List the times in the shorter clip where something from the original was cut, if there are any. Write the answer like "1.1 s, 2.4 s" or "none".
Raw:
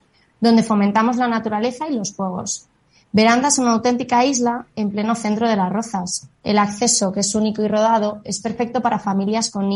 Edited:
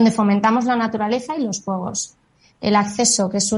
2.6 s